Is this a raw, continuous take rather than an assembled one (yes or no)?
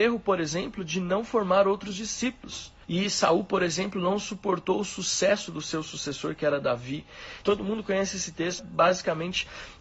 no